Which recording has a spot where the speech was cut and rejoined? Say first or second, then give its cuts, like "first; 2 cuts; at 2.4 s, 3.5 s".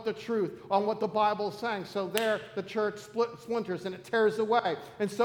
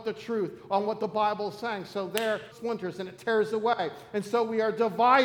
second; 1 cut; at 2.5 s